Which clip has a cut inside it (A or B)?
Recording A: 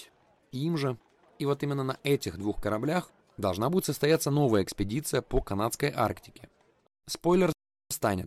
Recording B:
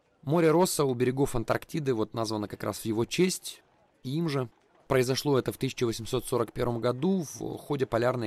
A